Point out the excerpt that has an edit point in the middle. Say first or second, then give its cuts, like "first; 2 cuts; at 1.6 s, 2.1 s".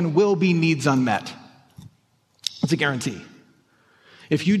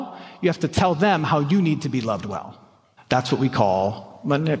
second; 1 cut; at 3.0 s